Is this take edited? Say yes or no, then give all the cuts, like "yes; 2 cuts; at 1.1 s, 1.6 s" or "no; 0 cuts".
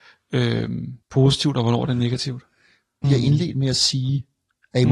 yes; 2 cuts; at 1.0 s, 3.0 s